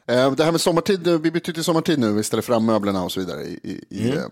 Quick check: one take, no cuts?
yes; 0 cuts

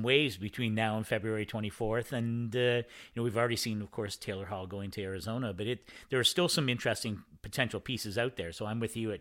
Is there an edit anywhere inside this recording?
no; 0 cuts

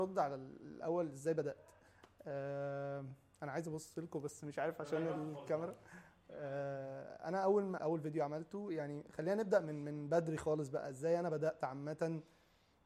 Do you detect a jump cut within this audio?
yes; 1 cut; at 7.8 s

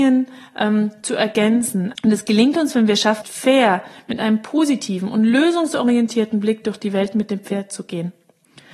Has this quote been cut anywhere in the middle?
yes; 2 cuts; at 2.0 s, 3.2 s

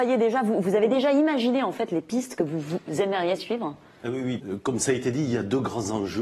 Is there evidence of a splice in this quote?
yes; 1 cut; at 4.4 s

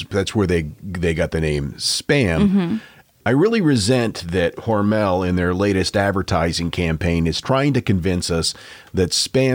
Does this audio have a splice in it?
no; 0 cuts

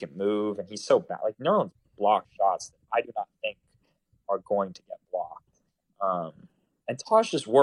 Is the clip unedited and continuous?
yes; 0 cuts

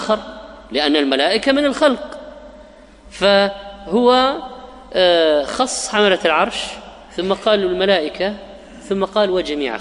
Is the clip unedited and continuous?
yes; 0 cuts

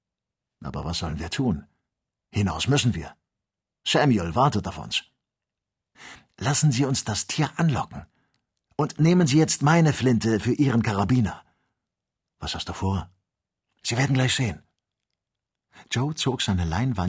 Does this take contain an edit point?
no; 0 cuts

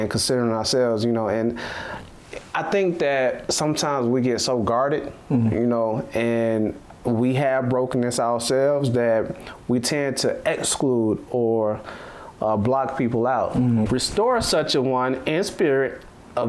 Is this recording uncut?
no; 1 cut; at 13.9 s

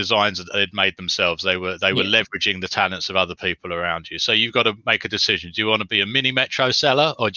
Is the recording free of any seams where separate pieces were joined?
yes; 0 cuts

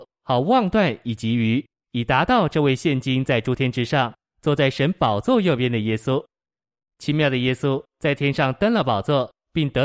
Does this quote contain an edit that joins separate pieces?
no; 0 cuts

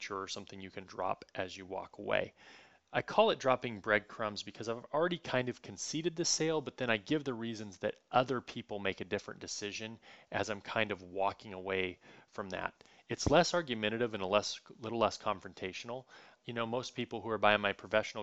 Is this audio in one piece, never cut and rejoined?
no; 1 cut; at 16.4 s

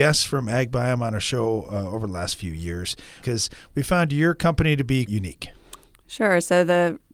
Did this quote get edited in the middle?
yes; 2 cuts; at 3.2 s, 5.1 s

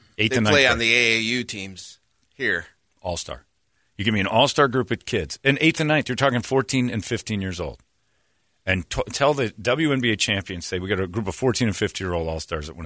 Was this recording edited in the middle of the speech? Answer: no; 0 cuts

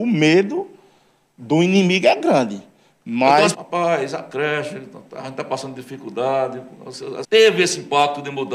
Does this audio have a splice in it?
yes; 2 cuts; at 3.5 s, 7.2 s

